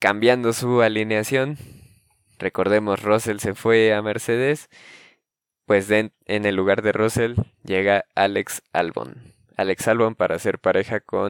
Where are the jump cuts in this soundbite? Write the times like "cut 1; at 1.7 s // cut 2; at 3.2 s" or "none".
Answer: none